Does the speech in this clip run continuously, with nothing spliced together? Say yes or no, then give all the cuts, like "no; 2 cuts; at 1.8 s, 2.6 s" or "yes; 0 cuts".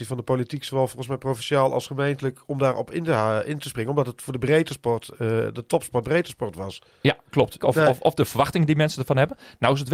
no; 1 cut; at 7.6 s